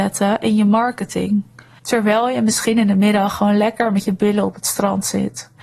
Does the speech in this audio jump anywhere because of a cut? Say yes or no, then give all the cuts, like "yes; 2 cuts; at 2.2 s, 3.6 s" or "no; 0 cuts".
yes; 1 cut; at 1.8 s